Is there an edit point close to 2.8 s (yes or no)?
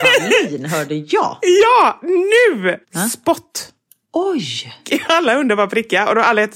yes